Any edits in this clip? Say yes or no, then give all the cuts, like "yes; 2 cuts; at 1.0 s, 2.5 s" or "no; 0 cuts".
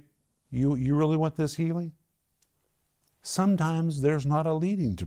no; 0 cuts